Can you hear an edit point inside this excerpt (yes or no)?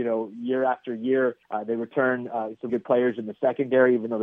yes